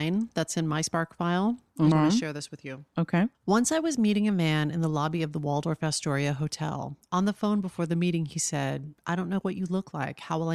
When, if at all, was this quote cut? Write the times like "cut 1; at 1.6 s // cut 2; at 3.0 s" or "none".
cut 1; at 1.9 s // cut 2; at 3.3 s